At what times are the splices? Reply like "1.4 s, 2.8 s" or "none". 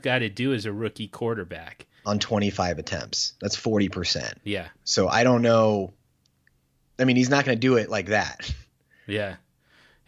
2.0 s, 4.4 s